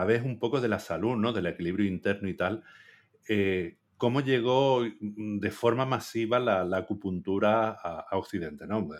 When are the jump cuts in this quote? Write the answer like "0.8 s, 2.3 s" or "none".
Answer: none